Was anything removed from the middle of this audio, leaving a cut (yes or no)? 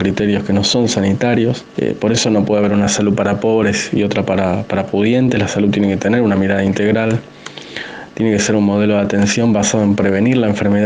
no